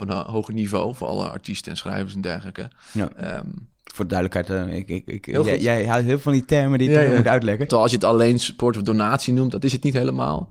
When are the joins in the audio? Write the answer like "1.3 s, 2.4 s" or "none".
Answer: 7.7 s